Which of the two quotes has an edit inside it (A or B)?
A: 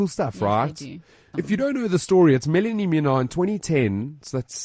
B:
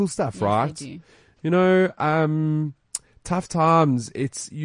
A